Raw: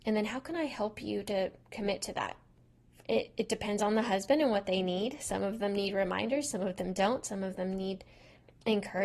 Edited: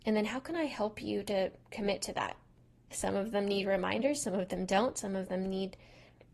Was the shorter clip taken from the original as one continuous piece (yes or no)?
no